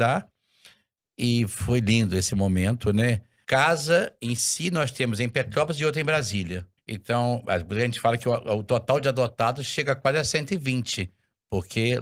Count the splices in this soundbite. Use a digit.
2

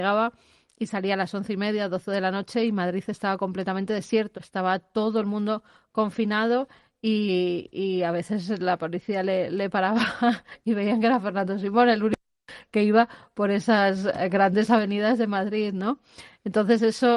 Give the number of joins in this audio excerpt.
1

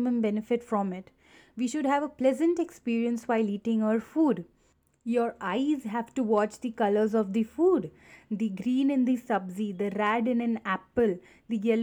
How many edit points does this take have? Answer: 0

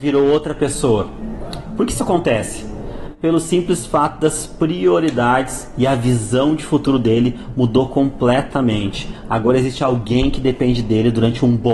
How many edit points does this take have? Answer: 0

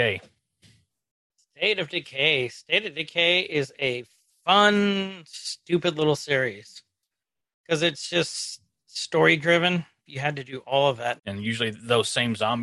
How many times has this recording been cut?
2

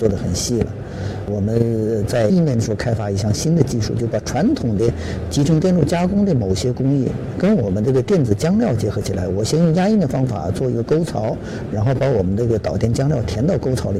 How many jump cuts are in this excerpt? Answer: 2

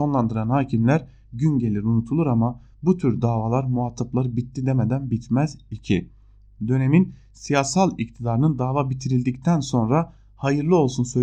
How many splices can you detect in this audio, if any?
0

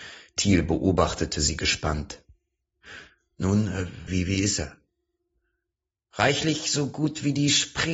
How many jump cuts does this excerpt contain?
1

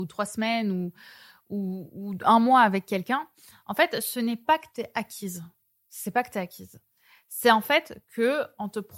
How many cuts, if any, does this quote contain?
0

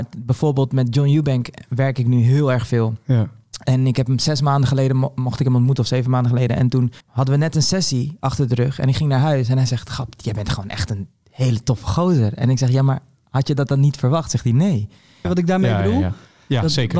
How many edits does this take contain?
2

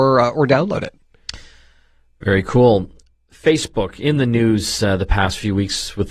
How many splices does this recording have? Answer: 0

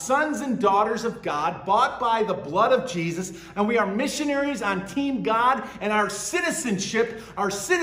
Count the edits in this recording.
0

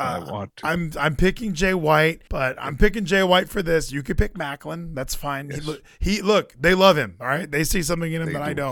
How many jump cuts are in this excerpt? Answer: 1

